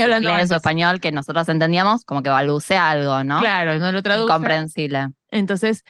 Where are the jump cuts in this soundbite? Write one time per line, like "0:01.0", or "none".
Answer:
0:02.1